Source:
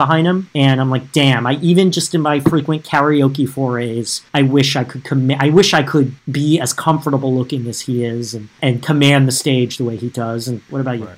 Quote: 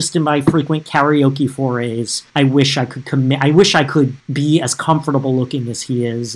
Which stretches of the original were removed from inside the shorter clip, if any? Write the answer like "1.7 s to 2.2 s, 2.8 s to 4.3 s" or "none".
none